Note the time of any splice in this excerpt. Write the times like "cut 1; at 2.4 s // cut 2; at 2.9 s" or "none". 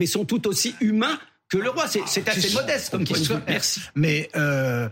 cut 1; at 3.5 s

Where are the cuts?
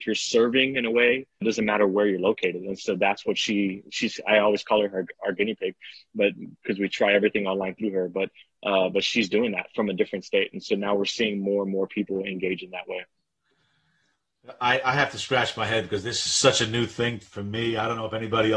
cut 1; at 1.4 s

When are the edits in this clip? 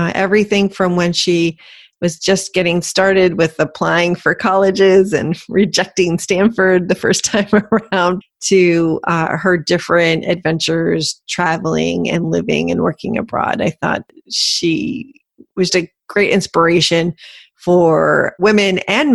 cut 1; at 8.2 s // cut 2; at 15.7 s

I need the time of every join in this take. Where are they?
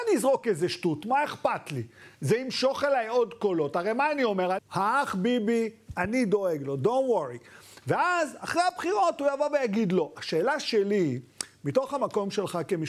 cut 1; at 4.6 s

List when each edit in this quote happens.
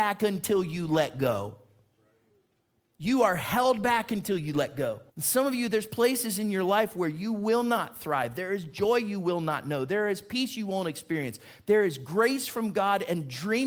cut 1; at 5.1 s

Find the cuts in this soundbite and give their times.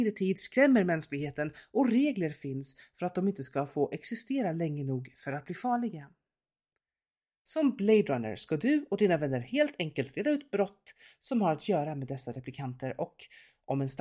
none

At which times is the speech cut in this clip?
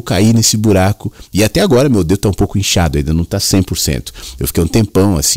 none

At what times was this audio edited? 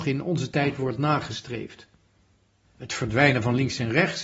cut 1; at 2.6 s

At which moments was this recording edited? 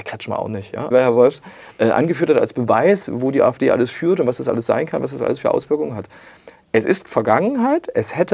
cut 1; at 0.9 s

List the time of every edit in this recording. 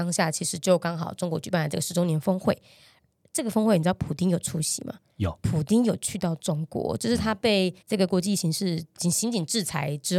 cut 1; at 7.8 s

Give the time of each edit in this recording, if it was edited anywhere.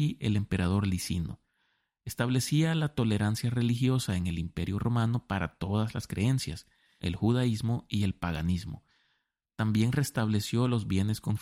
cut 1; at 7.0 s

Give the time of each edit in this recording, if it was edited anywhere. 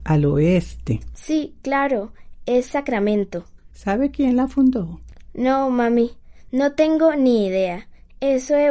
none

